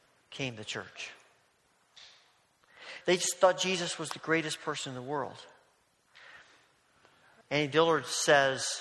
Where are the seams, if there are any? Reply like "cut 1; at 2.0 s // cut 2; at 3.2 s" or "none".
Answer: cut 1; at 3.0 s // cut 2; at 7.4 s